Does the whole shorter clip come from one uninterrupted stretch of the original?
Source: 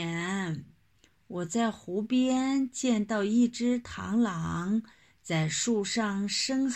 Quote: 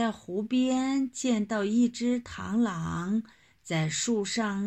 yes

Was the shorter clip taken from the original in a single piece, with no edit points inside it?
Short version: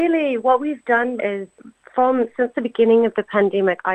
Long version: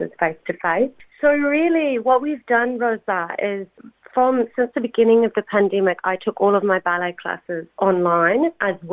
no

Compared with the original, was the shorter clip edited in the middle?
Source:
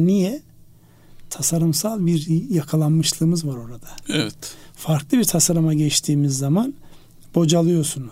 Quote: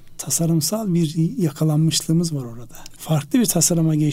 yes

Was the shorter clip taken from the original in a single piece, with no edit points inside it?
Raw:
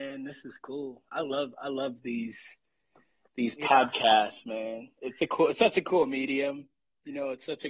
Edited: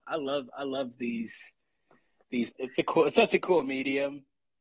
no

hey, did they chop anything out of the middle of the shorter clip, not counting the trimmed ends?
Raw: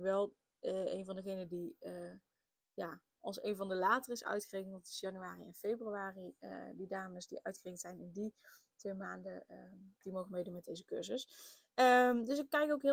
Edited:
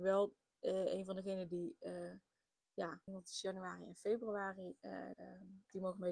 yes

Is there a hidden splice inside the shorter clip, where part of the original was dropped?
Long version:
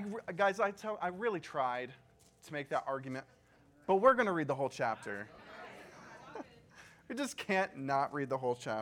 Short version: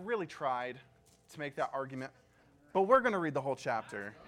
no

